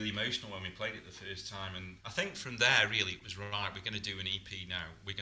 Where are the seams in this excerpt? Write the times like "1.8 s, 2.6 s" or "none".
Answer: 2.0 s